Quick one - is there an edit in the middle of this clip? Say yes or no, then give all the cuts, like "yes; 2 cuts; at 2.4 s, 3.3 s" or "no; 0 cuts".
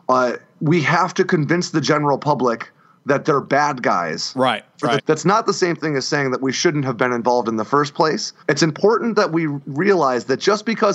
yes; 2 cuts; at 5.0 s, 8.4 s